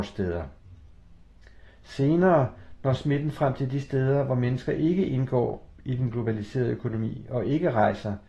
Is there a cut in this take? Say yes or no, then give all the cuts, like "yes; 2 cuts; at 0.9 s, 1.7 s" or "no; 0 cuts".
no; 0 cuts